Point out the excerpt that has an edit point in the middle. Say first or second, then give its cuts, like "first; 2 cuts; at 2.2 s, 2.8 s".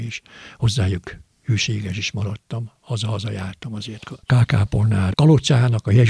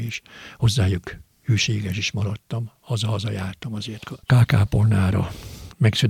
first; 1 cut; at 5.1 s